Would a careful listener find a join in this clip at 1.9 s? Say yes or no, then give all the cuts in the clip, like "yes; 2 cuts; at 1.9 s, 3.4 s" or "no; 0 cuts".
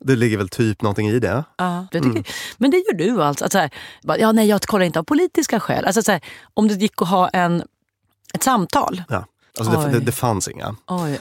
yes; 2 cuts; at 1.9 s, 9.5 s